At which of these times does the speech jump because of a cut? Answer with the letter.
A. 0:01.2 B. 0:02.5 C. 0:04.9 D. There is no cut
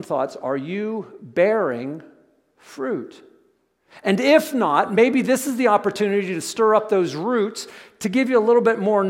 D